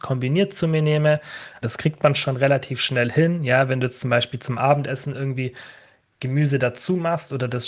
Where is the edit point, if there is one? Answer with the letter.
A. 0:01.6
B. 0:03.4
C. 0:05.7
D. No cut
A